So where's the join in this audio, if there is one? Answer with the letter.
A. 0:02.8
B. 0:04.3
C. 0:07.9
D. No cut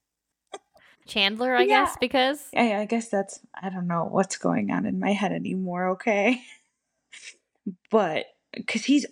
D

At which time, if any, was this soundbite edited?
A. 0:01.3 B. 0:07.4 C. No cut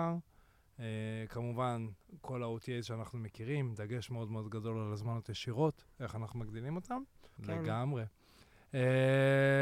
B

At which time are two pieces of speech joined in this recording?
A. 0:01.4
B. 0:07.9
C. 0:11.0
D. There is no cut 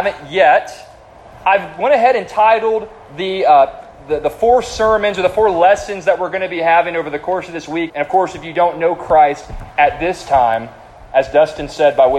B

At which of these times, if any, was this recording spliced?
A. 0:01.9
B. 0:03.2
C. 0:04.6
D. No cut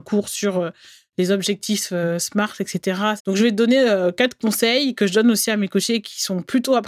B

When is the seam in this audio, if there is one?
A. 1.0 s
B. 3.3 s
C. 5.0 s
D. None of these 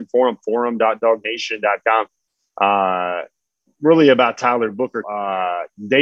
C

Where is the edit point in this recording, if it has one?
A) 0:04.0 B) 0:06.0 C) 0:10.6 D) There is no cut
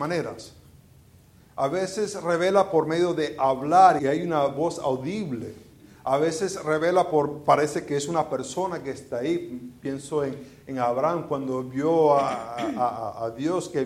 A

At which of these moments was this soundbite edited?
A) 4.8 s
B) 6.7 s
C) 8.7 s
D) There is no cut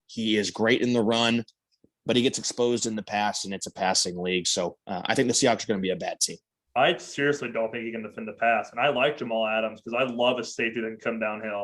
B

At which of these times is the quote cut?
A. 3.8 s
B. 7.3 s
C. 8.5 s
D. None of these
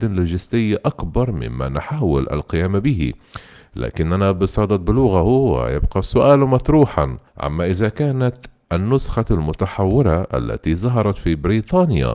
B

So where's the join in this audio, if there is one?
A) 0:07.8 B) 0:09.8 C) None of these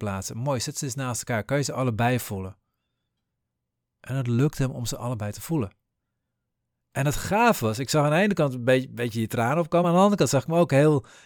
C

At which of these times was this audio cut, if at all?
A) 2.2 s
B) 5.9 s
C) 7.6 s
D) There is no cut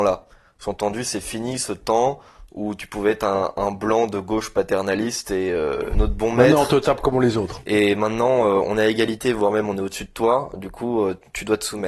B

